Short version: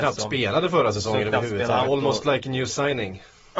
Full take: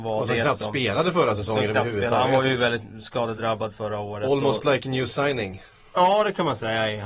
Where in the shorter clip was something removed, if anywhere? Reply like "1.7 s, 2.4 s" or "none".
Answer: 1.8 s